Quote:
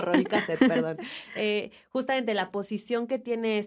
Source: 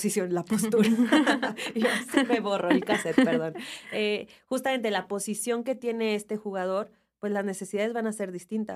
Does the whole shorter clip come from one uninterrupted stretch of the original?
yes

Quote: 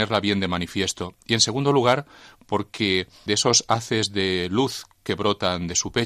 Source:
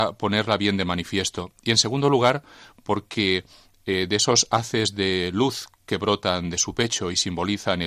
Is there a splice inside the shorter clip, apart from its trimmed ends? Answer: yes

